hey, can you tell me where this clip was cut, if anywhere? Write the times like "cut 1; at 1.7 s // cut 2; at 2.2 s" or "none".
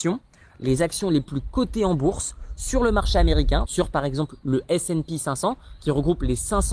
cut 1; at 3.6 s